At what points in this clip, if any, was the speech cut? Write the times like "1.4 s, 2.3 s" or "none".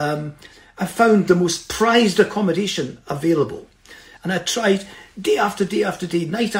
4.2 s